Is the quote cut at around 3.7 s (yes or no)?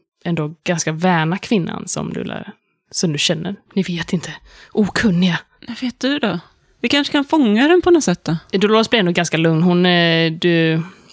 yes